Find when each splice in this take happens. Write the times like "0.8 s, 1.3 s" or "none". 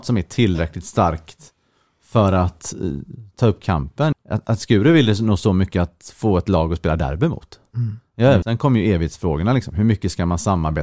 4.1 s, 8.4 s